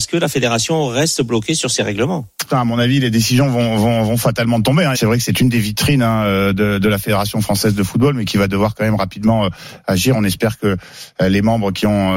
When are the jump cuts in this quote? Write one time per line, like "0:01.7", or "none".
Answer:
0:02.5
0:04.9